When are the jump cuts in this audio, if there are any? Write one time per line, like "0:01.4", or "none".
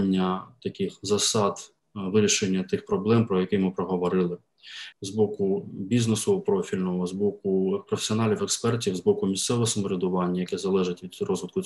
0:04.9